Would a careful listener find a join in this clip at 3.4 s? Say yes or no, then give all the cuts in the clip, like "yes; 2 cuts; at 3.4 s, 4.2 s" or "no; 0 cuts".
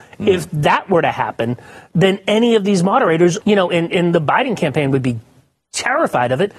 yes; 1 cut; at 3.4 s